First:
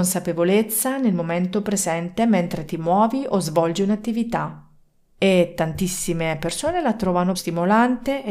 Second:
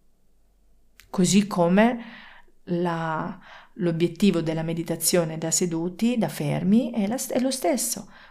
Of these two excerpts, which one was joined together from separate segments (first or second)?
first